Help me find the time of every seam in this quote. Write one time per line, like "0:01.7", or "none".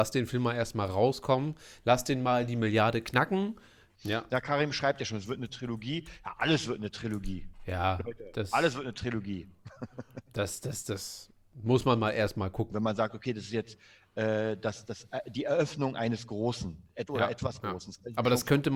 0:04.0
0:12.7